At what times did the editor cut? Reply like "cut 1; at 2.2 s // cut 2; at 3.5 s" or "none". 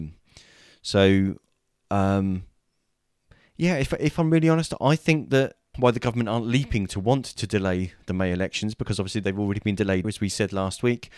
cut 1; at 5.7 s // cut 2; at 10.0 s